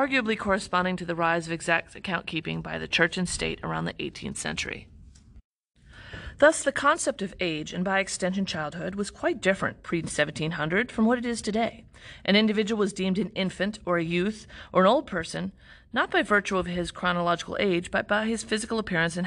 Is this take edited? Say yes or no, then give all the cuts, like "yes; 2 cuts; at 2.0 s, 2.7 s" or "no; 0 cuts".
no; 0 cuts